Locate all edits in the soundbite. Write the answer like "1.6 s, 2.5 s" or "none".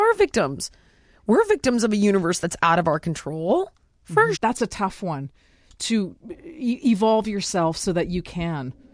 4.3 s